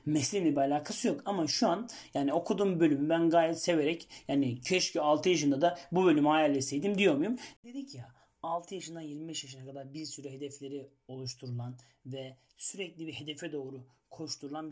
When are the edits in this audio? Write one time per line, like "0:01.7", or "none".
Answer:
0:07.6